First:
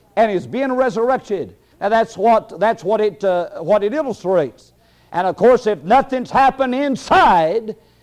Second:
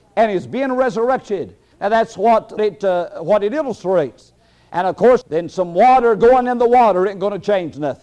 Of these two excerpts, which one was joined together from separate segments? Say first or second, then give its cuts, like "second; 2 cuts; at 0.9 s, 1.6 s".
second; 2 cuts; at 2.6 s, 5.2 s